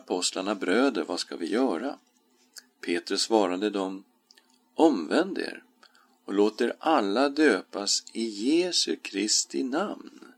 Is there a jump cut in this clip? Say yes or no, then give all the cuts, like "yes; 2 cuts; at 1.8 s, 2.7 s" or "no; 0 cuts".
no; 0 cuts